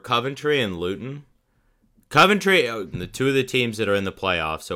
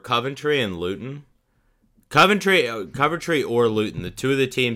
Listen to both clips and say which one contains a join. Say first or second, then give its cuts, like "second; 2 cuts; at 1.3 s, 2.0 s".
first; 1 cut; at 2.9 s